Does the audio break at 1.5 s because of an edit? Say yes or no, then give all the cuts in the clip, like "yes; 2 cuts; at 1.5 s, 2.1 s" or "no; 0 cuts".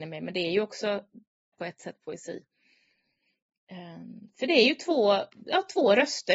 yes; 1 cut; at 1.5 s